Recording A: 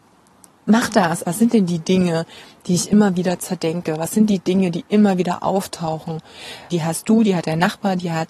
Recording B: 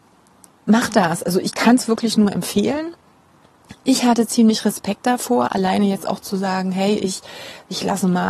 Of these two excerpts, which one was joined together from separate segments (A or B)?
A